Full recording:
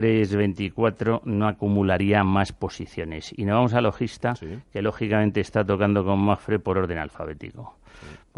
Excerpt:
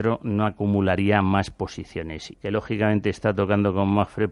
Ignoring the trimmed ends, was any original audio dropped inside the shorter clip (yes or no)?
yes